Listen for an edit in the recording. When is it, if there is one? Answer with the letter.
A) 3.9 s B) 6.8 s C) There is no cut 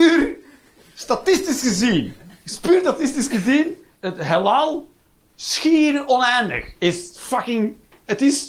A